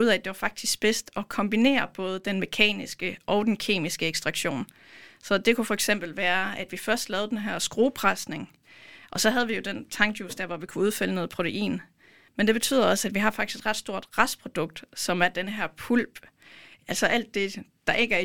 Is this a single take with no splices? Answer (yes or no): no